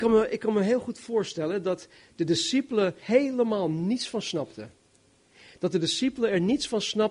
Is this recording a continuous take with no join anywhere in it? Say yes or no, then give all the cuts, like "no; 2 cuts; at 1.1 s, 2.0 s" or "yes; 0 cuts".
no; 1 cut; at 3.0 s